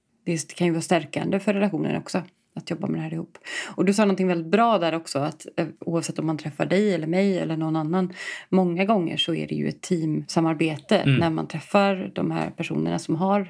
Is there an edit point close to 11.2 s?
no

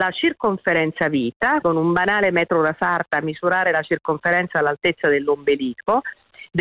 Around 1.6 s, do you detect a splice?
yes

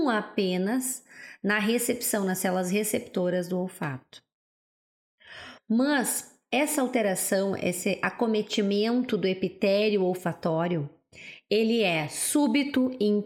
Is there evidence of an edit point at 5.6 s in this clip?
yes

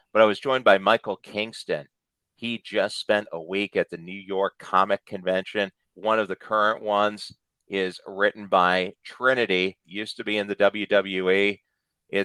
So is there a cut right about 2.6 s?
no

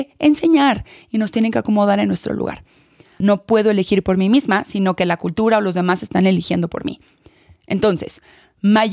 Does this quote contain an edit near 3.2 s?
yes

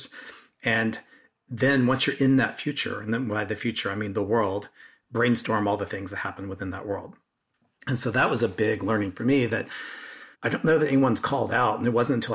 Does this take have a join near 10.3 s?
yes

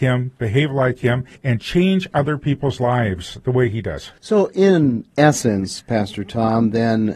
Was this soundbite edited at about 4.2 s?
no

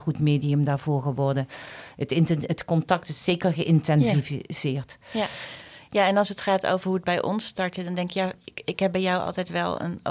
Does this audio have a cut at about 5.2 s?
no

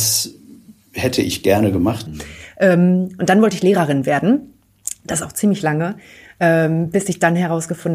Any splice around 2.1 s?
yes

